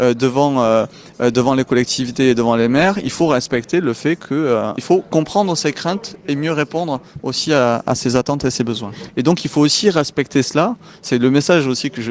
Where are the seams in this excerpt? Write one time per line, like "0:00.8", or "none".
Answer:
0:04.8
0:09.1